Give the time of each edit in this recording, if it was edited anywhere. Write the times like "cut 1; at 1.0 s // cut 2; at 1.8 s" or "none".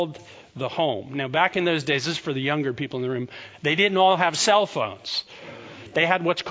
none